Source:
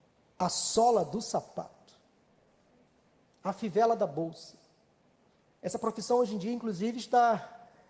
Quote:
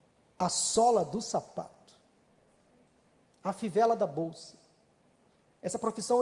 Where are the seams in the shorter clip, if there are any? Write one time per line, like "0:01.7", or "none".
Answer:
none